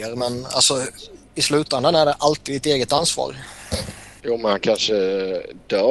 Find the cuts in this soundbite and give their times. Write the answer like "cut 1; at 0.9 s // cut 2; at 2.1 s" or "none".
cut 1; at 4.2 s